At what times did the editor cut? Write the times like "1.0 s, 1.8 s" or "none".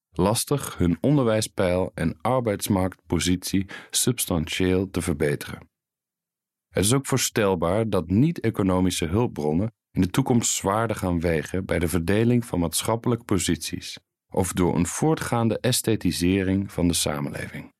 14.1 s